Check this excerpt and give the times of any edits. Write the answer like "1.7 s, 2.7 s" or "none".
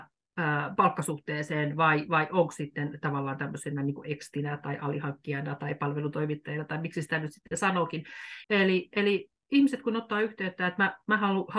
8.4 s